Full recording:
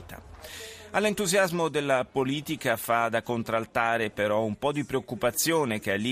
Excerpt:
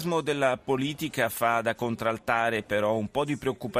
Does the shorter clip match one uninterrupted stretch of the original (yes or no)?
yes